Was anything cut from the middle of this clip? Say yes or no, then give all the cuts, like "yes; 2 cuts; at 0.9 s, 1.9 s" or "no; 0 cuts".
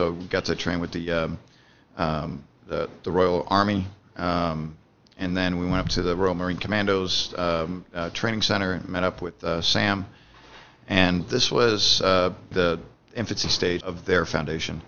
yes; 3 cuts; at 11.2 s, 12.5 s, 13.8 s